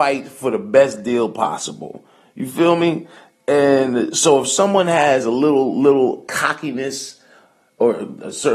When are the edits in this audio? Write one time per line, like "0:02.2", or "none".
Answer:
none